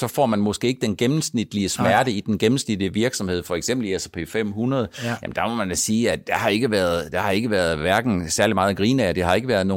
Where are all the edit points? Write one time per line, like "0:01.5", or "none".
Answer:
none